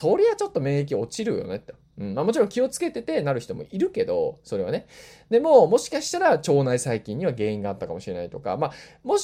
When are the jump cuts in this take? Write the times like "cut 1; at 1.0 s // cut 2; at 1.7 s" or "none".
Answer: none